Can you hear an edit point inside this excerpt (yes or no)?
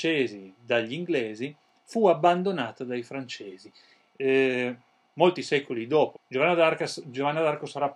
yes